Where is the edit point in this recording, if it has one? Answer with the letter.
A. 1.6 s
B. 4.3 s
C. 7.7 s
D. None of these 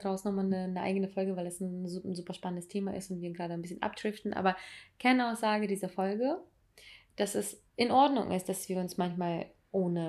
C